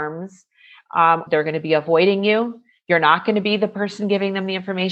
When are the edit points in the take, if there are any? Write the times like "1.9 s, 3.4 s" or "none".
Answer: 1.3 s